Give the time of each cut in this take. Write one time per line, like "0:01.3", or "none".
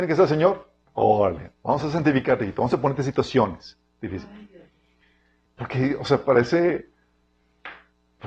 0:05.5